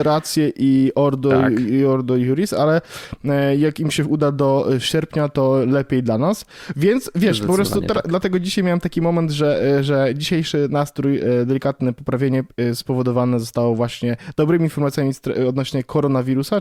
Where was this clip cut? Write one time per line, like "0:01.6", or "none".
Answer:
none